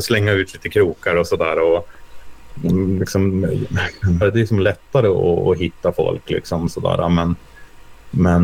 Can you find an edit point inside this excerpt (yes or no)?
yes